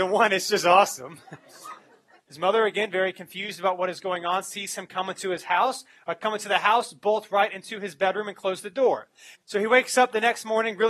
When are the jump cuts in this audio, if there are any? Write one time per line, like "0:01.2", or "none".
0:02.2
0:09.4